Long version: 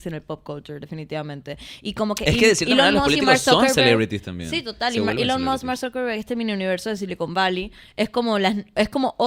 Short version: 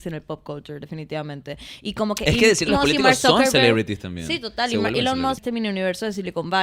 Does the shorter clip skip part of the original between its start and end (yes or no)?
yes